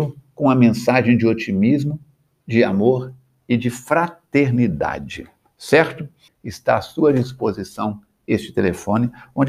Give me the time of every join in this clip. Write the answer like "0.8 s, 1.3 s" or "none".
6.3 s